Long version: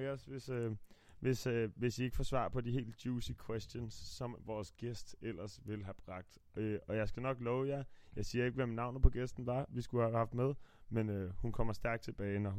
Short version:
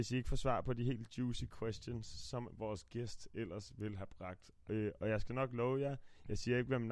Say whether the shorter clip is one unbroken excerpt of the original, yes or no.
yes